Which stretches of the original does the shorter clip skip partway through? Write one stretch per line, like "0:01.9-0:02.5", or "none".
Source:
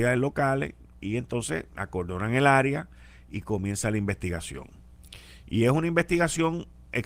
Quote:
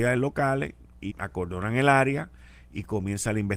0:01.1-0:01.7